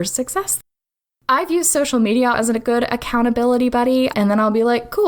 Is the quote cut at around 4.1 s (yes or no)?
yes